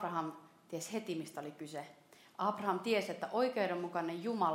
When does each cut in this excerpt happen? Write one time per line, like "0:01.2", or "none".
none